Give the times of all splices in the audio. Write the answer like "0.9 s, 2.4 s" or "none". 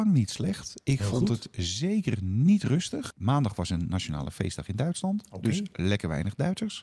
3.1 s